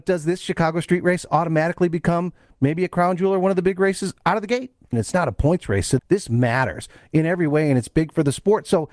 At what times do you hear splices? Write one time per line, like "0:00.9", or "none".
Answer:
0:04.9
0:06.0

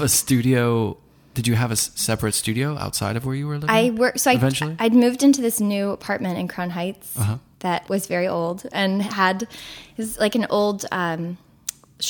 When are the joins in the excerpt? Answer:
0:07.9

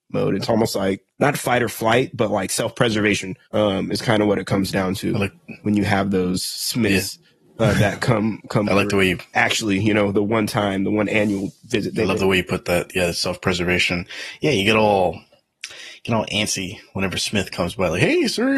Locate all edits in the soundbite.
0:01.1
0:03.4

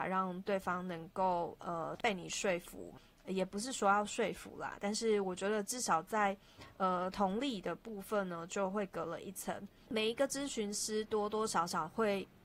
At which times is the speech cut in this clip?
none

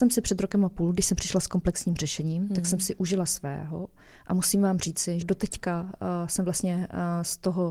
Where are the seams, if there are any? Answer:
0:05.2

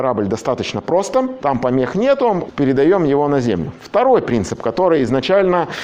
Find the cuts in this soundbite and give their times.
0:01.4
0:02.5

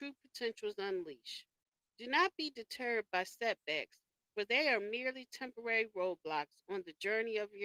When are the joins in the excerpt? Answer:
none

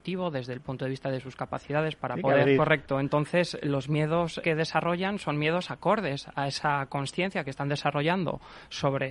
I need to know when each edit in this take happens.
0:02.6
0:04.4

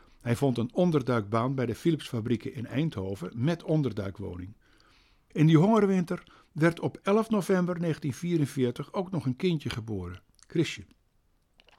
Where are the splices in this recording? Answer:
0:05.3

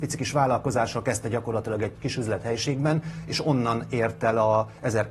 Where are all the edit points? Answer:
0:02.0

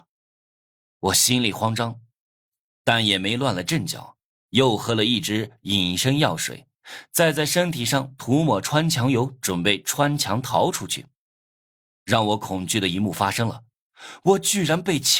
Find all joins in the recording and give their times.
none

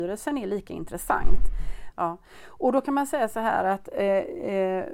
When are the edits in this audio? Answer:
0:01.9

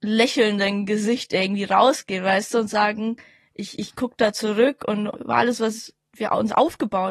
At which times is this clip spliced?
0:05.1

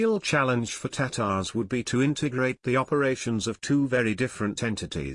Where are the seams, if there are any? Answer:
none

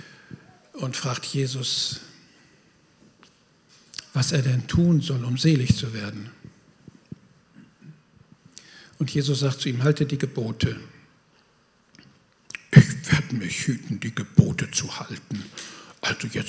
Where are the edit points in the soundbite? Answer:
none

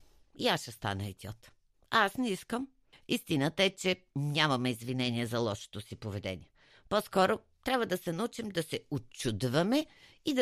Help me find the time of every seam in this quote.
0:02.9

